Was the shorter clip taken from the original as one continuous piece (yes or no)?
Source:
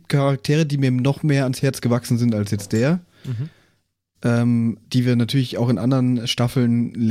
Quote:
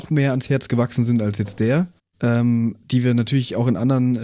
no